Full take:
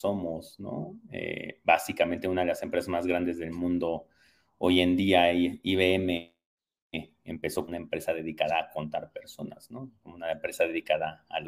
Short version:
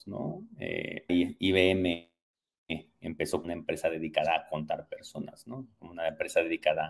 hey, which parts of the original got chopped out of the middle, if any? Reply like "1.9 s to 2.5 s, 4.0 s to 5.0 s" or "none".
1.6 s to 5.3 s